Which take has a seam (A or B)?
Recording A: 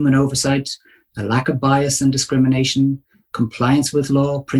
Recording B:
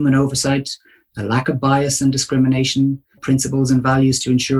B